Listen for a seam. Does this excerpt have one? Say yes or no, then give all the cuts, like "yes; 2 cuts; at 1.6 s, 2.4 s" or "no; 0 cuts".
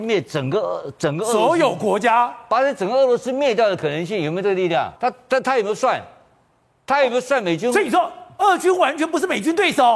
yes; 1 cut; at 5.0 s